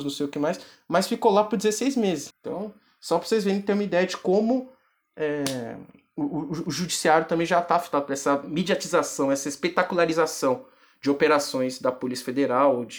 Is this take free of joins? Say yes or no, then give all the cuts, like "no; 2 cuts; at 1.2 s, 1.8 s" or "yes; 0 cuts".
no; 1 cut; at 2.3 s